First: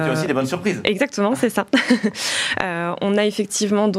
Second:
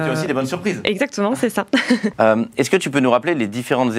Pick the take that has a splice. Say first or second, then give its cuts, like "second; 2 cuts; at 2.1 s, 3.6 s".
second; 1 cut; at 2.1 s